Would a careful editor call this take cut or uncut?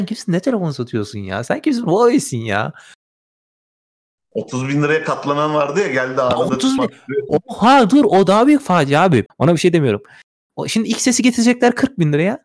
cut